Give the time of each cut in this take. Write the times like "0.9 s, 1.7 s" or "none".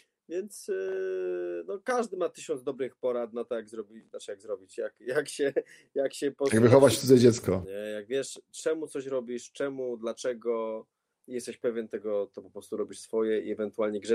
7.6 s